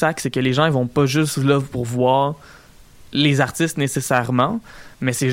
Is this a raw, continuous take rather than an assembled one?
yes; 0 cuts

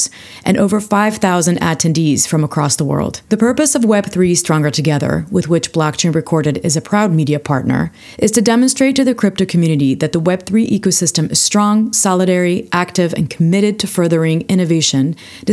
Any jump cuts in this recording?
yes; 1 cut; at 3.2 s

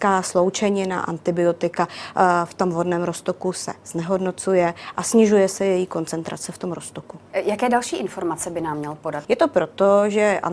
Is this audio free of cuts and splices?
no; 2 cuts; at 7.3 s, 9.2 s

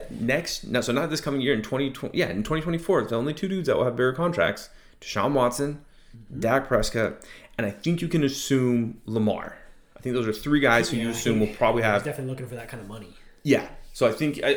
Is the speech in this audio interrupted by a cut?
no; 0 cuts

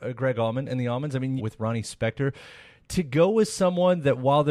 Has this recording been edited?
yes; 1 cut; at 1.4 s

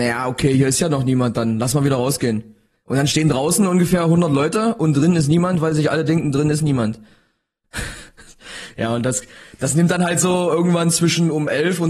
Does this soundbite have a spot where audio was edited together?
yes; 1 cut; at 2.7 s

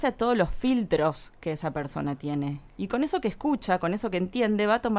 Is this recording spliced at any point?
no; 0 cuts

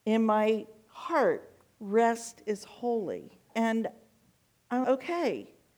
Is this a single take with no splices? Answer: no; 2 cuts; at 3.5 s, 4.8 s

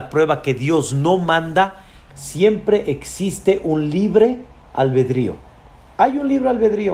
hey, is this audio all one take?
no; 1 cut; at 2.1 s

